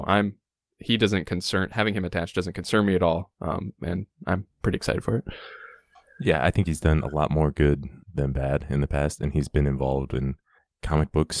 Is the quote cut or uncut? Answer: cut